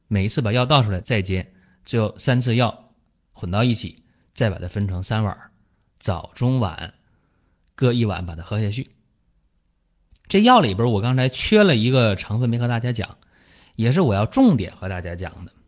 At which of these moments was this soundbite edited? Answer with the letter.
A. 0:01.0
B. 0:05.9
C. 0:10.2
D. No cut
A